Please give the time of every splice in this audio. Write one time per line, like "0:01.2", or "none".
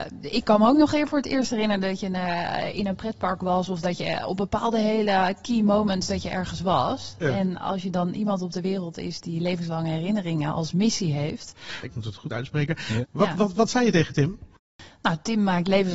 0:11.8
0:13.0